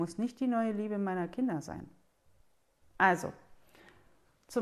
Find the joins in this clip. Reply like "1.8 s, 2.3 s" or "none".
none